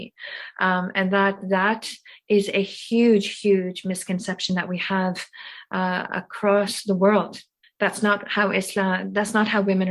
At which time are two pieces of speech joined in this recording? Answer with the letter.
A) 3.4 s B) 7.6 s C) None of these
B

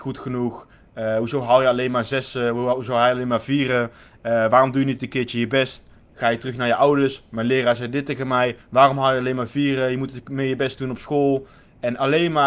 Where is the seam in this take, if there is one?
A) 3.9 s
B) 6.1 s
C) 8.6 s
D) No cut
C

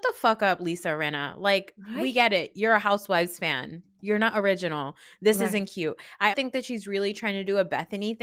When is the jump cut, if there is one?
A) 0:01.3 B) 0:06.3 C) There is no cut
B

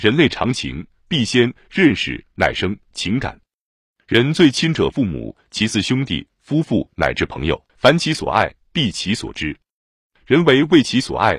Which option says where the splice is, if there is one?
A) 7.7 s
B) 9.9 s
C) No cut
A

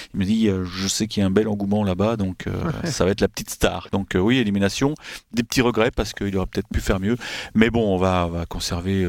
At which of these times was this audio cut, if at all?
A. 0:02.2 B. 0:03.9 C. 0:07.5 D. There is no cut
B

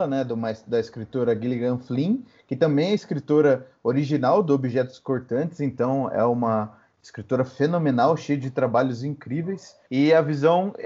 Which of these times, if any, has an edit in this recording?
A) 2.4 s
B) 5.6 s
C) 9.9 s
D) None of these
C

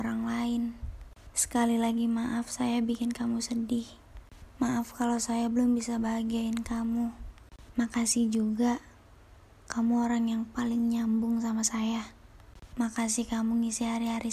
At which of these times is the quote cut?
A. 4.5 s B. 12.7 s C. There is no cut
C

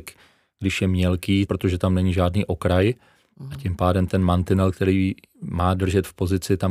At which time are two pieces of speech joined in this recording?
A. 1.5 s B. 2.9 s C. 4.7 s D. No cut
A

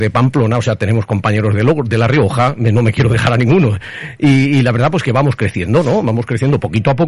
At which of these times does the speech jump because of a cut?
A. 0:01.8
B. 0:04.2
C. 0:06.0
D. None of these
D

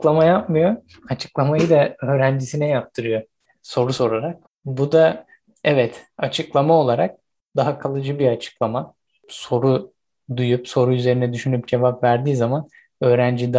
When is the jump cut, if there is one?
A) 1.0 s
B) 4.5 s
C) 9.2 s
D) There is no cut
B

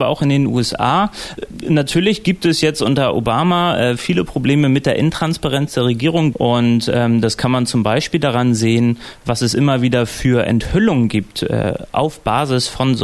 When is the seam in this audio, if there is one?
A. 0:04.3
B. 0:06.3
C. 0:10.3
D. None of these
B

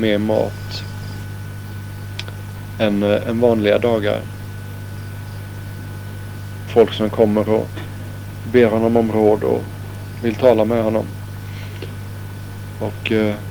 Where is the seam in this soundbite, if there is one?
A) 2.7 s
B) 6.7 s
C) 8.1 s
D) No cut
B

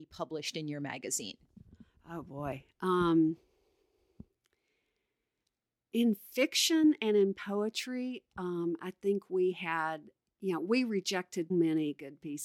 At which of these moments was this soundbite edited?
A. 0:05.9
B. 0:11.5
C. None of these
B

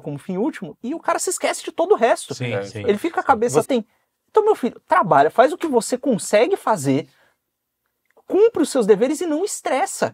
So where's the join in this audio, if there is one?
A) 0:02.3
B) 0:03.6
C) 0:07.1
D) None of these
B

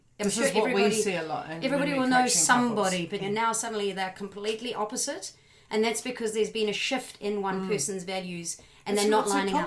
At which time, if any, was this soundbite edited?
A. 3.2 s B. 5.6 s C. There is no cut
A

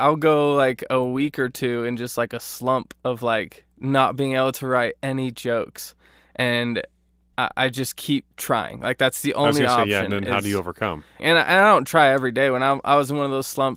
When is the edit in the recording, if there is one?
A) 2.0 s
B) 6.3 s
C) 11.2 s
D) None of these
C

